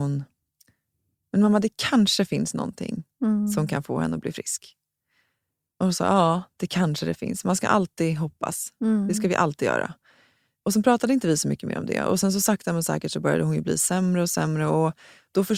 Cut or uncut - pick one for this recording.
uncut